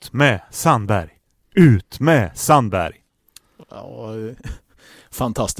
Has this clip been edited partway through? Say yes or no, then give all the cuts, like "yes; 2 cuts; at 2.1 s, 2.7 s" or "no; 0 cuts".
no; 0 cuts